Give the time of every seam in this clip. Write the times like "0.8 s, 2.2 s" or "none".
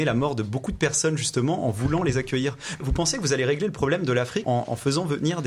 2.8 s, 4.4 s